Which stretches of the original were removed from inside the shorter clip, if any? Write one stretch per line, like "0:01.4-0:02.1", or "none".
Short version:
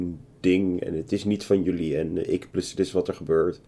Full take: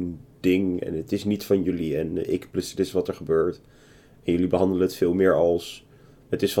none